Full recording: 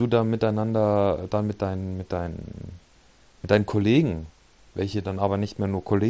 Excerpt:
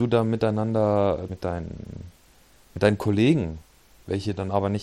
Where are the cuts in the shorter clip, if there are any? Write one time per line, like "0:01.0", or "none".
0:01.3